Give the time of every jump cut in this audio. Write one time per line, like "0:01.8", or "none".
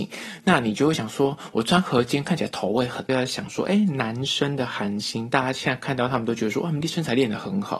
0:03.1